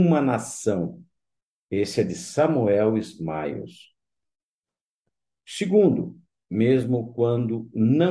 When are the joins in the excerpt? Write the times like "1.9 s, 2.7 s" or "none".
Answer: 6.4 s